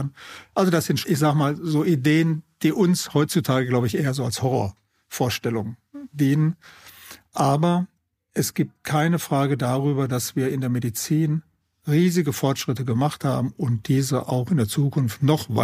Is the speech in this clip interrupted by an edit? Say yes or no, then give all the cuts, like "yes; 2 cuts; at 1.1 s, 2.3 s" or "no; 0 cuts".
yes; 1 cut; at 1.0 s